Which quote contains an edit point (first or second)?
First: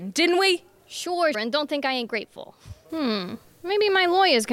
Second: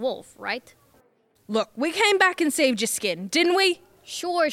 first